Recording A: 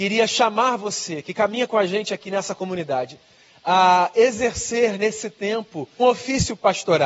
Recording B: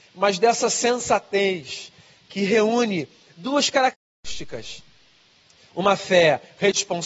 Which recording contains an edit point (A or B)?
A